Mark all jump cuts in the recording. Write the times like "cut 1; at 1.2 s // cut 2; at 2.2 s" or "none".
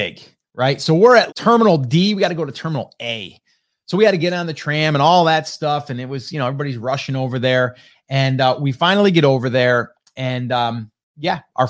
cut 1; at 1.3 s